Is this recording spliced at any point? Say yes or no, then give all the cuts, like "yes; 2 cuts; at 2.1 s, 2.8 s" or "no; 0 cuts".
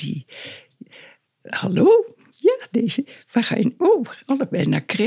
no; 0 cuts